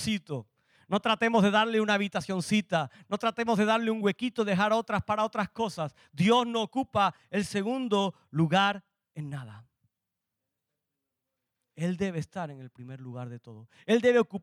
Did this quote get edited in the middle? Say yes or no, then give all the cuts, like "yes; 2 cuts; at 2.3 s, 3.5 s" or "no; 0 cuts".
no; 0 cuts